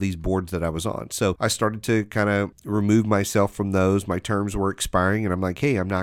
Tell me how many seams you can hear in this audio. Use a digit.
0